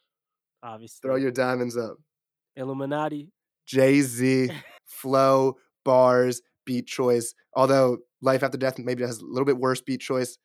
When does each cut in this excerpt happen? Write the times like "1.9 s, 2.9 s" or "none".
4.8 s